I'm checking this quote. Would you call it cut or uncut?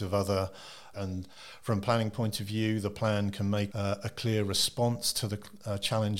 cut